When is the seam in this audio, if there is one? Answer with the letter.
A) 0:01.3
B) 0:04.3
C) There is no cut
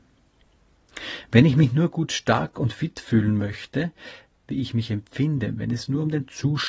B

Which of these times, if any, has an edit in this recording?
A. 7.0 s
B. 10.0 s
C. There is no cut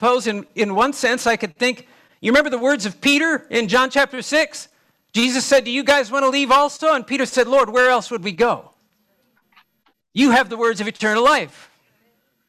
C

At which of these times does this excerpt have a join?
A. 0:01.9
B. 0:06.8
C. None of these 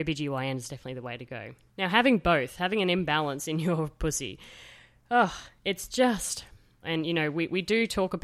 B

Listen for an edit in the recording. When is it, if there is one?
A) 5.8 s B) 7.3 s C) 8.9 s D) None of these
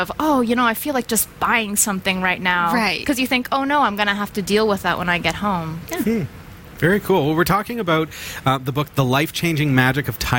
A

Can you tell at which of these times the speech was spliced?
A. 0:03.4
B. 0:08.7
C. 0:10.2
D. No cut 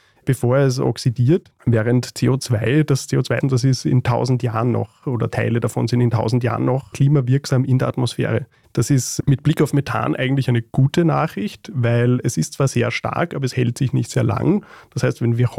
A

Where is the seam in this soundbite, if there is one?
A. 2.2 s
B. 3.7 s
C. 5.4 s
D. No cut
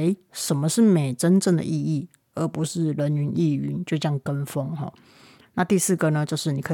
C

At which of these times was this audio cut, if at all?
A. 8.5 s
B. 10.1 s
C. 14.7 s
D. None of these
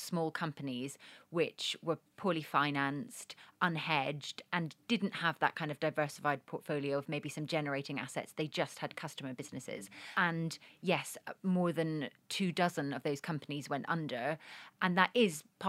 D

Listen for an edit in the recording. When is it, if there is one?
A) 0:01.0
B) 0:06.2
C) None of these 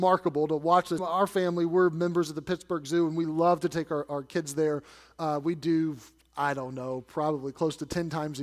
A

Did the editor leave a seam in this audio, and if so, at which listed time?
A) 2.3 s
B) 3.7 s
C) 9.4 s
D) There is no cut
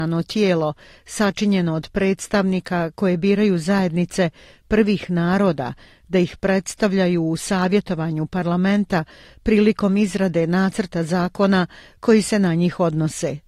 D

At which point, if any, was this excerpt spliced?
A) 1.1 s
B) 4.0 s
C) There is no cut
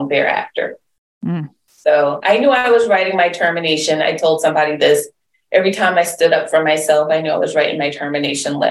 C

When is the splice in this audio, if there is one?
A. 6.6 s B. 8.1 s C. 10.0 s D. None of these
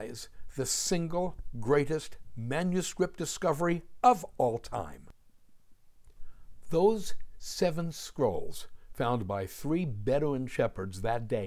A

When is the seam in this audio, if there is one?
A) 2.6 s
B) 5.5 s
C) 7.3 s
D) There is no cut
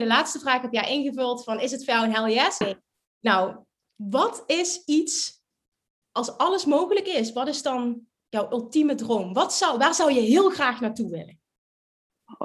A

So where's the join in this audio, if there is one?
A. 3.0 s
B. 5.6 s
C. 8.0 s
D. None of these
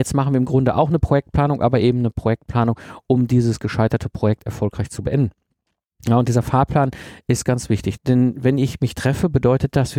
C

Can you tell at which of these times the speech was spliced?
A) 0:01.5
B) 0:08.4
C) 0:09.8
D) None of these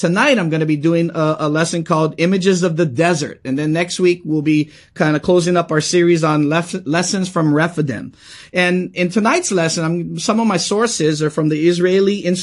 D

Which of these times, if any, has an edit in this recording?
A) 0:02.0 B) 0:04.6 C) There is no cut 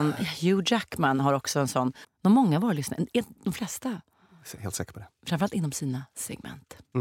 A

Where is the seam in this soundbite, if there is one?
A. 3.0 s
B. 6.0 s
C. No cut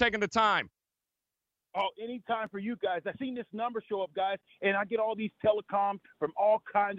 B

